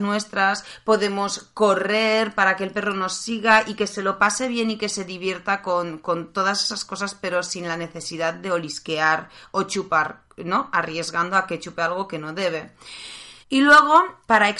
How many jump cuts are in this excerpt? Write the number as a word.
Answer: one